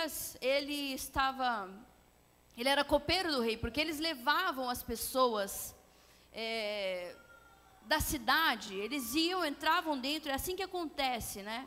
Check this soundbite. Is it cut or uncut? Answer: uncut